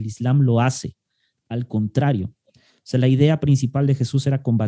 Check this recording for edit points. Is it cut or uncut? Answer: uncut